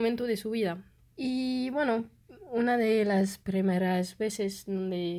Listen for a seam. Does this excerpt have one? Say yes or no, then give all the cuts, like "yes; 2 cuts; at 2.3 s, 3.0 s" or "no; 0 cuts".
yes; 1 cut; at 1.1 s